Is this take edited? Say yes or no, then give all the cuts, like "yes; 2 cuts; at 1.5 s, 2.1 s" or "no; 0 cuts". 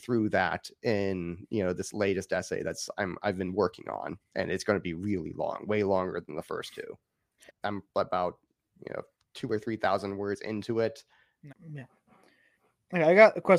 yes; 2 cuts; at 7.5 s, 11.5 s